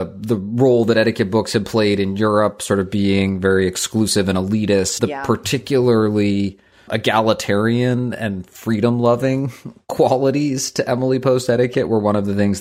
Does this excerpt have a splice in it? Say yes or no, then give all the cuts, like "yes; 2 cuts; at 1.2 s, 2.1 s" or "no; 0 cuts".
yes; 2 cuts; at 5.0 s, 6.9 s